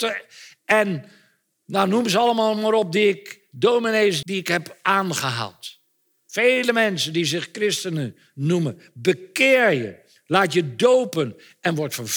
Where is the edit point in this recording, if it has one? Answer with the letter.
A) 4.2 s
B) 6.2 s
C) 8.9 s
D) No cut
A